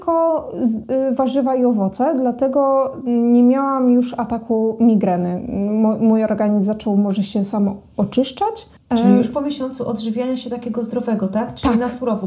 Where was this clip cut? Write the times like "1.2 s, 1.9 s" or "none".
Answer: 8.8 s